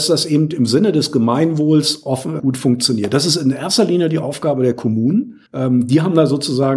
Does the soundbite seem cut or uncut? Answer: cut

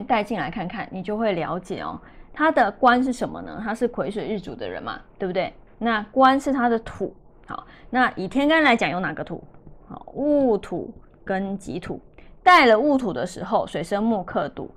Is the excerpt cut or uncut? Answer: uncut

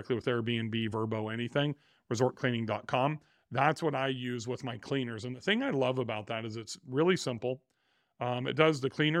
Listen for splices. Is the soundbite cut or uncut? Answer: uncut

